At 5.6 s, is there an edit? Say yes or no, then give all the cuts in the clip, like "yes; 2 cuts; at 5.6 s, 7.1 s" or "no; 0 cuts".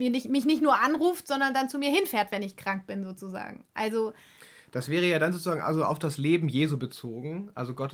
no; 0 cuts